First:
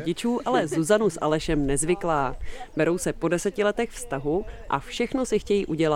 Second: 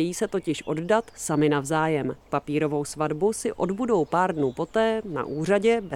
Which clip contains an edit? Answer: second; 1 cut; at 2.2 s

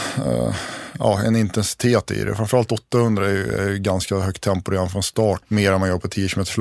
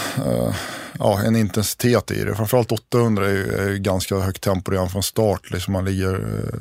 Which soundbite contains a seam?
first; 1 cut; at 5.4 s

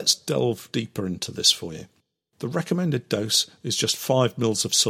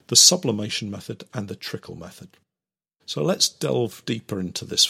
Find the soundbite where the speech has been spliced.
second; 1 cut; at 3.0 s

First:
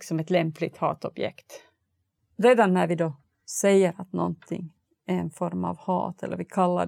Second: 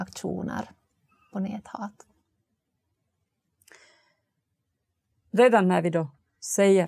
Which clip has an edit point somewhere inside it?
first; 1 cut; at 2.2 s

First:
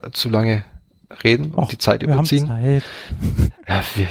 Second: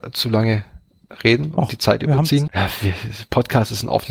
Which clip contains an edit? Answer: second; 1 cut; at 2.5 s

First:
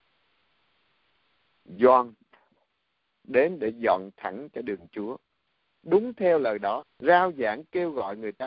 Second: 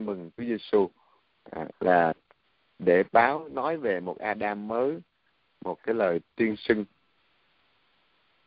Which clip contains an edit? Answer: first; 1 cut; at 6.8 s

